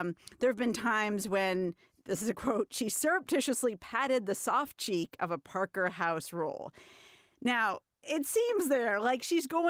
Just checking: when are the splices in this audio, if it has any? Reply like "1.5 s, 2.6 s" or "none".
none